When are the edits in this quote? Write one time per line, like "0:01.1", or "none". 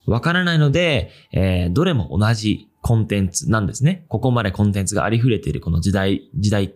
none